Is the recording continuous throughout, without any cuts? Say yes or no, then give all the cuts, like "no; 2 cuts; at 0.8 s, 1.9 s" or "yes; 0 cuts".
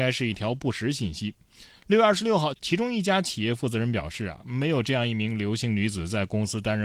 no; 1 cut; at 2.5 s